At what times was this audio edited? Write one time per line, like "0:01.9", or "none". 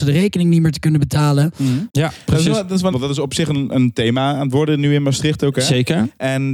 0:01.9
0:02.9